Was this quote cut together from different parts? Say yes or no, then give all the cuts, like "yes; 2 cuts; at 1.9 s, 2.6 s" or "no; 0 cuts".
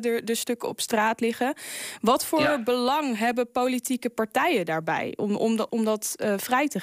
yes; 1 cut; at 5.7 s